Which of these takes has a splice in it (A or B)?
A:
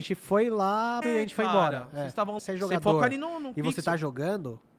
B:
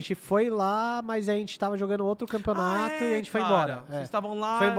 A